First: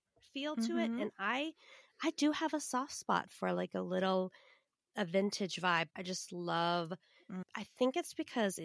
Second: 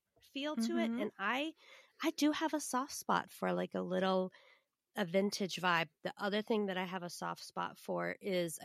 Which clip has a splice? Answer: first; 2 cuts; at 5.9 s, 7.4 s

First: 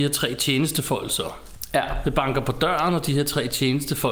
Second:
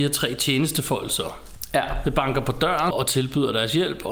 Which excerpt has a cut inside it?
second; 1 cut; at 2.9 s

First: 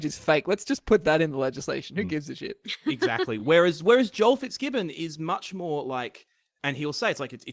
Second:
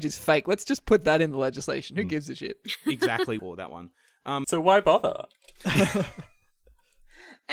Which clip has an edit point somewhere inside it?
second; 2 cuts; at 3.4 s, 4.4 s

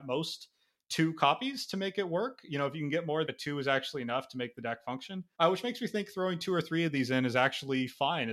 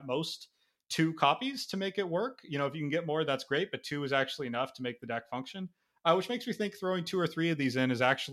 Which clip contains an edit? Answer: first; 2 cuts; at 3.3 s, 5.3 s

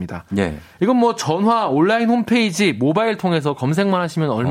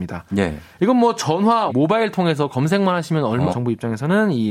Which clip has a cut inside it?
second; 2 cuts; at 1.7 s, 3.5 s

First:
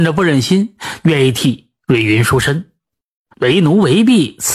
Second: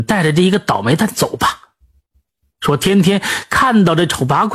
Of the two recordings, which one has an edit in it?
first; 2 cuts; at 1.0 s, 3.3 s

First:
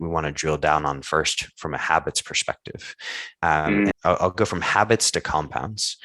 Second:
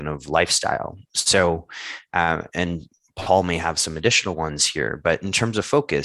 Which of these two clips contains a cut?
first; 1 cut; at 3.9 s

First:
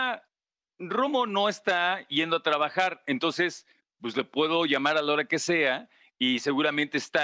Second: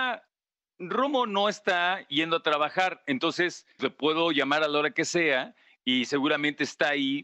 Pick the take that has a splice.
second; 1 cut; at 3.8 s

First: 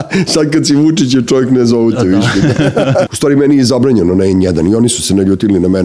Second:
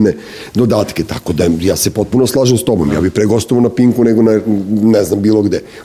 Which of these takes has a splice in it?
first; 1 cut; at 3.1 s

